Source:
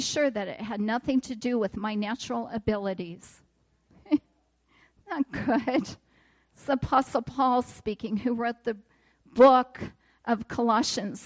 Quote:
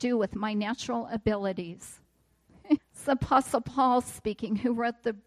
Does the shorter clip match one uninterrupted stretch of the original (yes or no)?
no